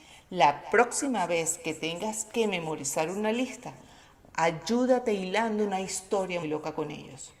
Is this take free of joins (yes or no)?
no